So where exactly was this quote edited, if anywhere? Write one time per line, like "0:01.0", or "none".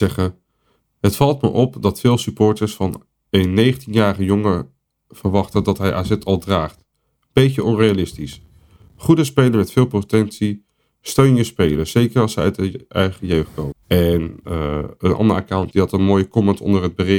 0:13.7
0:15.7